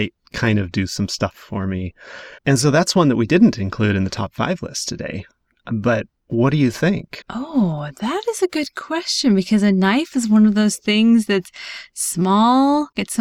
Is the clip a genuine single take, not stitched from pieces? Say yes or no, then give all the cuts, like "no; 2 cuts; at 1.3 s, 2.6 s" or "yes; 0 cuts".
no; 2 cuts; at 2.4 s, 7.2 s